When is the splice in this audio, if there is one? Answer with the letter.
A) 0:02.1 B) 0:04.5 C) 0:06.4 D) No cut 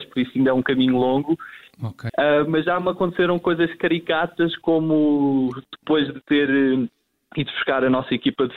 A